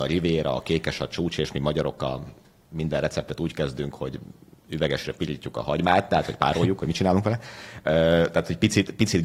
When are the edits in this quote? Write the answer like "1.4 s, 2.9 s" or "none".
none